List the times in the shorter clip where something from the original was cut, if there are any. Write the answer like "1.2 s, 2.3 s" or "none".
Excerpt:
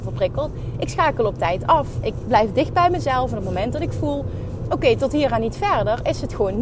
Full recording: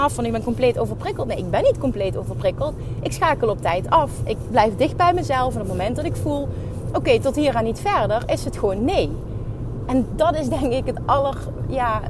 none